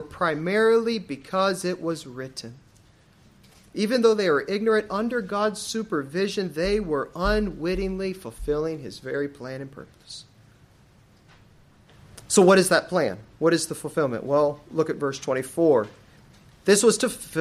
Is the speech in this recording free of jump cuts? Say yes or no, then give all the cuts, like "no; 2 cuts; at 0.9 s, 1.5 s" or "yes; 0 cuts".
yes; 0 cuts